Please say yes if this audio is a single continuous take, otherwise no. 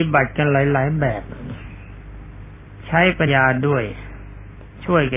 no